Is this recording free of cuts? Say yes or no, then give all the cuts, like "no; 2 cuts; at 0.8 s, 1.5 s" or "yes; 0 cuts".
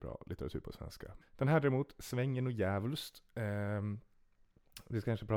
no; 1 cut; at 1.2 s